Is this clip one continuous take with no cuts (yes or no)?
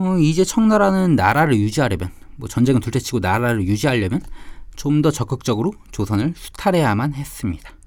yes